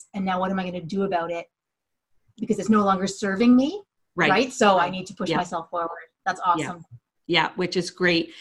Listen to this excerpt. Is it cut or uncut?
uncut